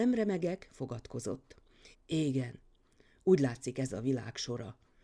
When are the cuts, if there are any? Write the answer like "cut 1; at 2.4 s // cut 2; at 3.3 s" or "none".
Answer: cut 1; at 1.9 s